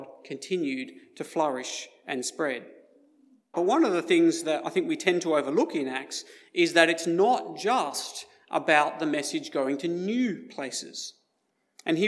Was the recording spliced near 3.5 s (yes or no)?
yes